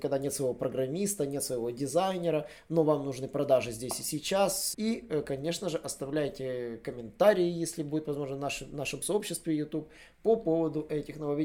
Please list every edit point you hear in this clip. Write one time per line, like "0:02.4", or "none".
0:04.7